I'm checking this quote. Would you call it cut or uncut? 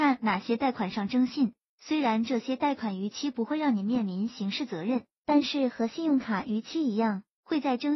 uncut